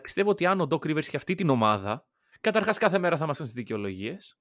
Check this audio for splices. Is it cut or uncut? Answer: cut